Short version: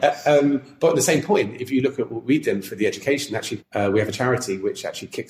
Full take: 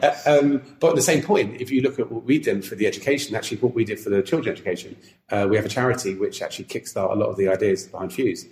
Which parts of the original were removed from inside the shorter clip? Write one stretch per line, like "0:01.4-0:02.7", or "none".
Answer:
0:03.6-0:05.2